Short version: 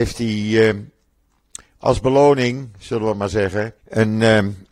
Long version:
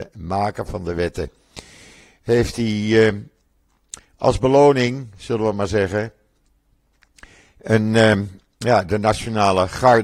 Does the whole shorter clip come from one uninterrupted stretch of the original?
no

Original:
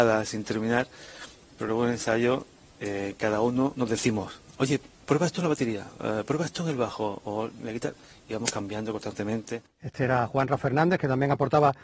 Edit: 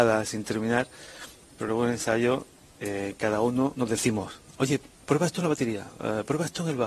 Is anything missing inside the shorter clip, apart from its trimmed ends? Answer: no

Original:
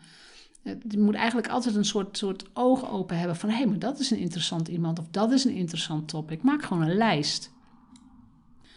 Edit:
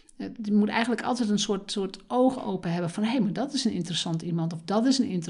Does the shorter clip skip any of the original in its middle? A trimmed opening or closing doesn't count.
no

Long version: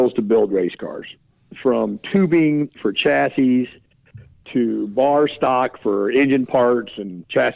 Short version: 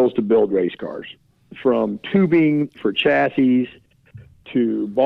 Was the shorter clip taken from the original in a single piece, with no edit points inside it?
yes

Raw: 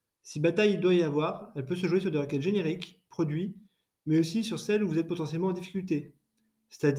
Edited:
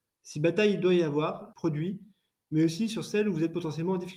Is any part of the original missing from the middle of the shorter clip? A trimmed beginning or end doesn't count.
yes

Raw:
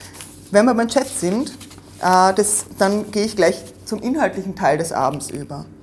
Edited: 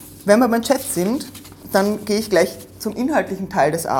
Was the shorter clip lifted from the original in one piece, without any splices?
no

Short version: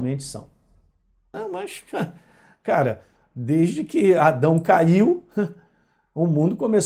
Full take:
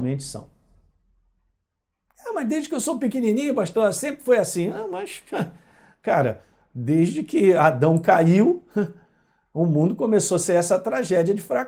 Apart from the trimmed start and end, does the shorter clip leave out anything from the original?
yes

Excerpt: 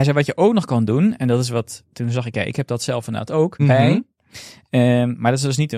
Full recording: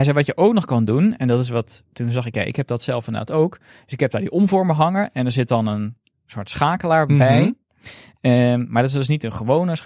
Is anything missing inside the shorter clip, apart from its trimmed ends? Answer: yes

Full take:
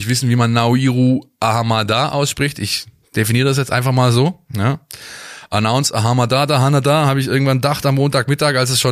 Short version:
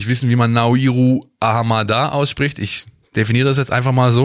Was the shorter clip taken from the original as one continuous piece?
yes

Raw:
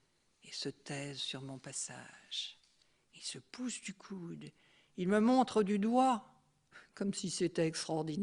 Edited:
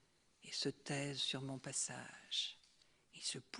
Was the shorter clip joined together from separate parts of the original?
no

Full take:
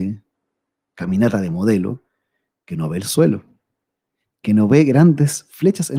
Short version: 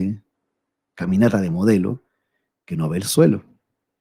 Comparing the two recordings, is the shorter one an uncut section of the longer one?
yes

